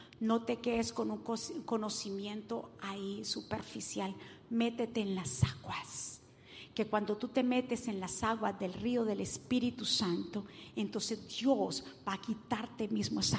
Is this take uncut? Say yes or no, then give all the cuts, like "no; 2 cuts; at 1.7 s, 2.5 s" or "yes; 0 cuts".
yes; 0 cuts